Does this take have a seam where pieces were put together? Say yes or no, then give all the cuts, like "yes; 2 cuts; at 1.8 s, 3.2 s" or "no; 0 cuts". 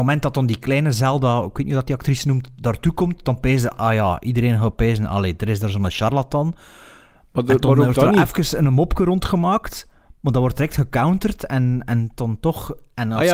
no; 0 cuts